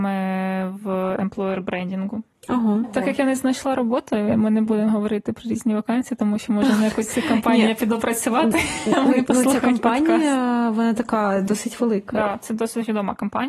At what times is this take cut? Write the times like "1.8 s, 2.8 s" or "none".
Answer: none

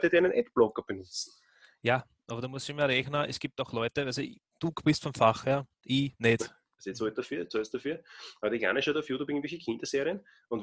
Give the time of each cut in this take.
6.7 s

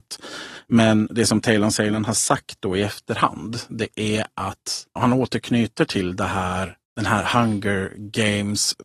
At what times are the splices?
5.0 s, 6.8 s

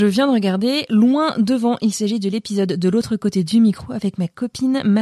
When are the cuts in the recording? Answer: none

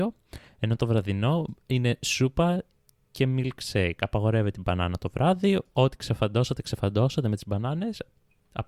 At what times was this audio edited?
none

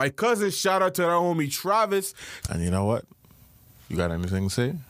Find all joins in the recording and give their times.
2.4 s

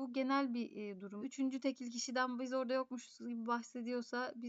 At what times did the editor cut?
1.2 s

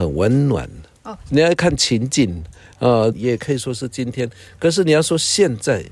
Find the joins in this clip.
1.3 s, 3.1 s

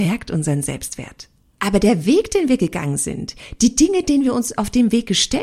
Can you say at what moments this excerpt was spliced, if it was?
1.6 s

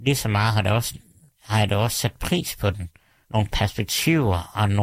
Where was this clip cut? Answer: 3.3 s

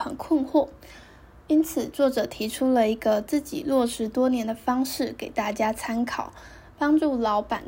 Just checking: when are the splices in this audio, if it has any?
none

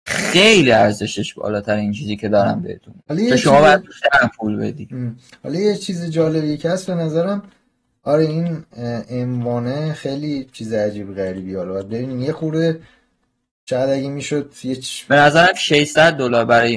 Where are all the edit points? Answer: 3.0 s, 15.1 s

